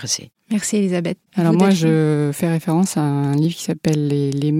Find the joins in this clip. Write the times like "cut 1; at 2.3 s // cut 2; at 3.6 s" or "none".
cut 1; at 1.3 s